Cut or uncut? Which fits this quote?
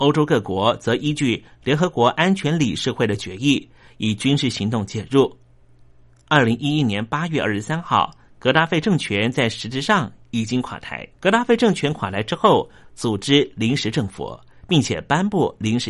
cut